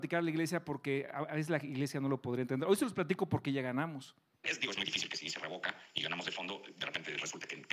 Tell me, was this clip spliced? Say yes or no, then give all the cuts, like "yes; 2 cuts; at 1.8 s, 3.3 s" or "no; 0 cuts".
yes; 1 cut; at 4.4 s